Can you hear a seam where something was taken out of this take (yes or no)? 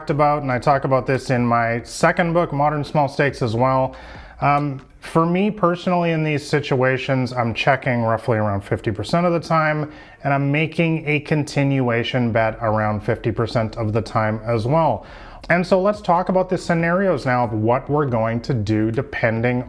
yes